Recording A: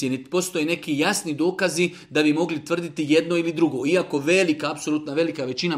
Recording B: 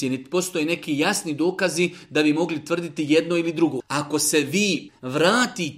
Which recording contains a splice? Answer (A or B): B